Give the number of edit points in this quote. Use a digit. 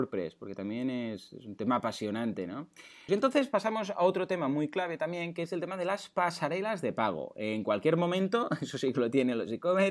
1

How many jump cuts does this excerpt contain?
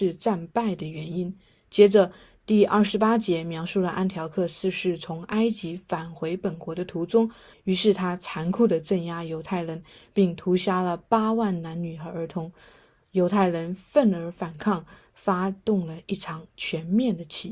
1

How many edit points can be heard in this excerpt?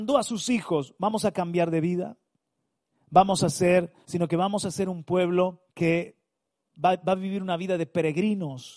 2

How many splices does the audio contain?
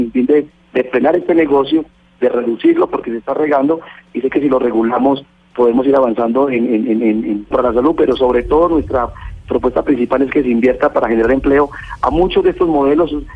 1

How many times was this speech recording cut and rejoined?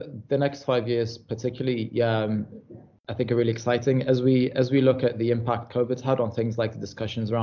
0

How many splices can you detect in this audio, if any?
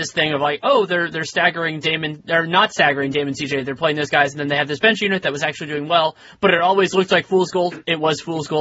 0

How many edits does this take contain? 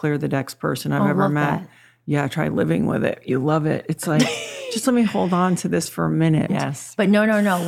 1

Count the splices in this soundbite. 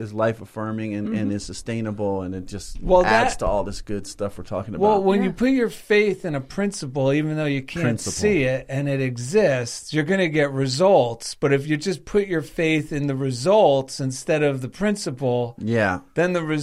0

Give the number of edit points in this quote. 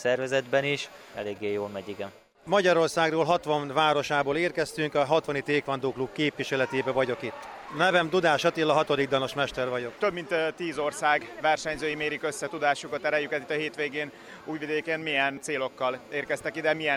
1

